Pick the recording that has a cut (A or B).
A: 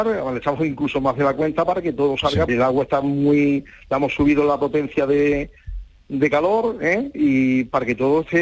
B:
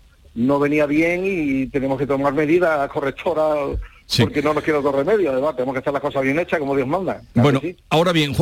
A